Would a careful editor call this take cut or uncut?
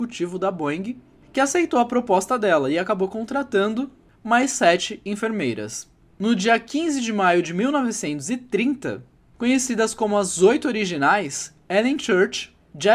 uncut